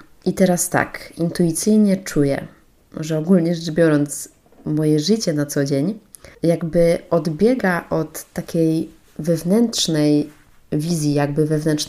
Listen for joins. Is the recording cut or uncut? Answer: uncut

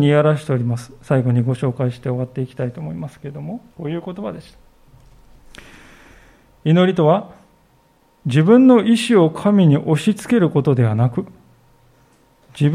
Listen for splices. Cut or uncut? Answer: cut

